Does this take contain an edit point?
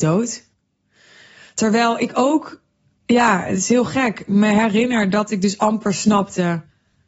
no; 0 cuts

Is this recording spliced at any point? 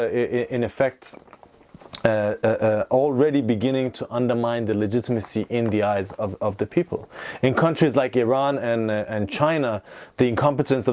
no; 0 cuts

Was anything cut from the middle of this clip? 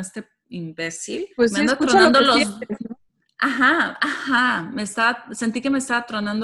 yes; 1 cut; at 1.3 s

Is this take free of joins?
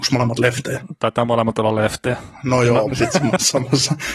no; 1 cut; at 2.9 s

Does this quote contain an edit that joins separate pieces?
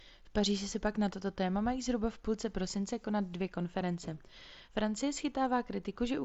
no; 0 cuts

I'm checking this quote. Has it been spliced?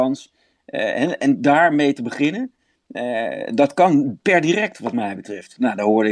no; 0 cuts

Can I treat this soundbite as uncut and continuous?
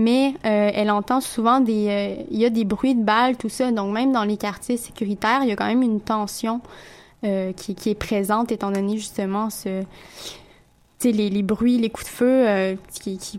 yes; 0 cuts

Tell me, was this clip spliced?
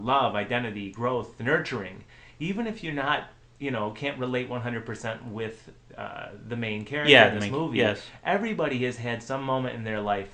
no; 0 cuts

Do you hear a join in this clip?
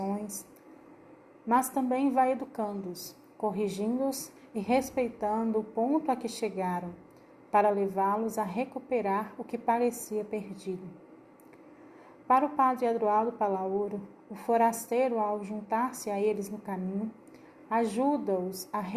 no; 0 cuts

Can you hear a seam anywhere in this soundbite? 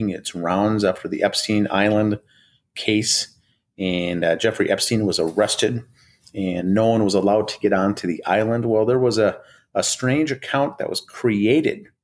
no; 0 cuts

